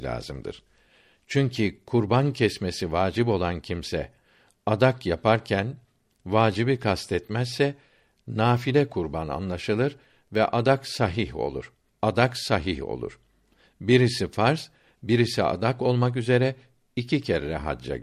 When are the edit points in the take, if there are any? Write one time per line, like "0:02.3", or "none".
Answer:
0:11.9

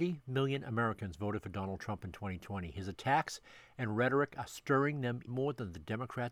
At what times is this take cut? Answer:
0:05.3

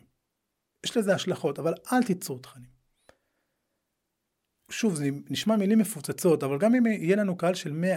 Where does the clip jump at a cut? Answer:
0:04.7

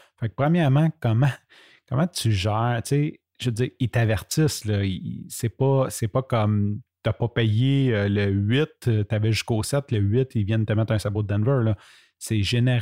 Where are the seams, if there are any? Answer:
none

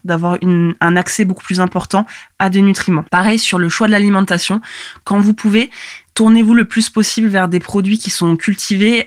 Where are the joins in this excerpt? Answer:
0:03.1

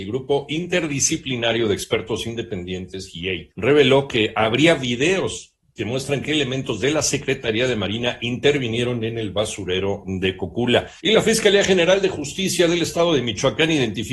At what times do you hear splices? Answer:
0:11.0

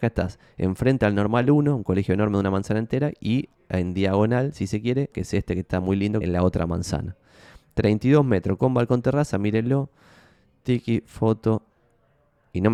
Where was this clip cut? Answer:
0:05.1
0:06.2

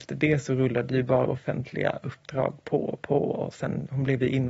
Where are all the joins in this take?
none

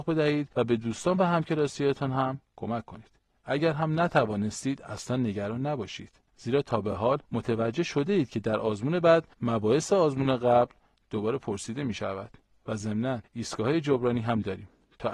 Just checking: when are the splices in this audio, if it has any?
0:03.3

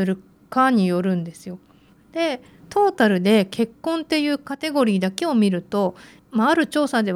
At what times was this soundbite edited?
0:01.9

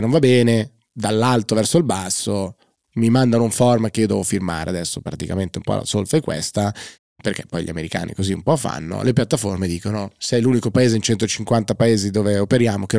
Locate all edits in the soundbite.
none

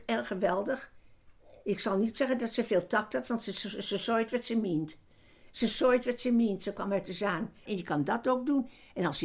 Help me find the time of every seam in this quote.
0:05.6
0:07.7

